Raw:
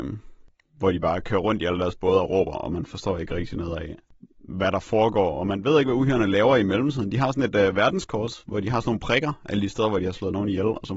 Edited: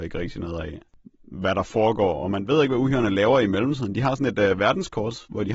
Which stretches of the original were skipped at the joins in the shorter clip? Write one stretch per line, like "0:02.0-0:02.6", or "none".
none